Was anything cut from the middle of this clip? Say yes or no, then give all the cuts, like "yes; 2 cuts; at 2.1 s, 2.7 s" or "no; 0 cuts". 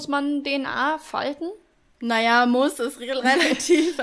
yes; 1 cut; at 1.9 s